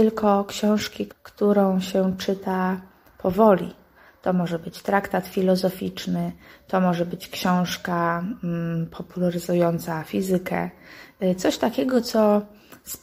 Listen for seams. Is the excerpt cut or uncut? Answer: cut